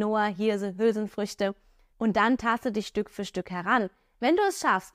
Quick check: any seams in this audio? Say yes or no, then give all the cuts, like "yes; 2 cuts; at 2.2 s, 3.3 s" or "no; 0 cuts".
yes; 1 cut; at 1.9 s